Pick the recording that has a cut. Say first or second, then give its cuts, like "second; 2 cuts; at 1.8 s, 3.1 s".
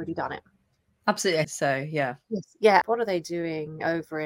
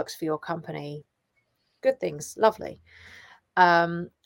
first; 2 cuts; at 1.4 s, 2.8 s